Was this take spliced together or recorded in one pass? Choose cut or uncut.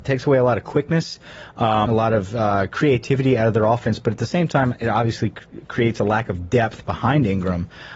cut